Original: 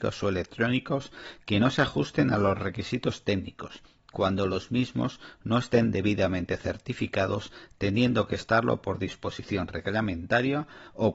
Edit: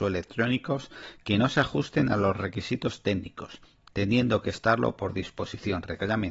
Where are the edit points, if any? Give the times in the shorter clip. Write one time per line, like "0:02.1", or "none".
0:03.9